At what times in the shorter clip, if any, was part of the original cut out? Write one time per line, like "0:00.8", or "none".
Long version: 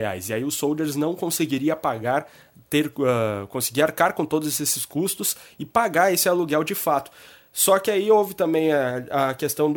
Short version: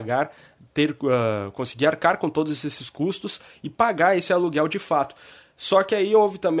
none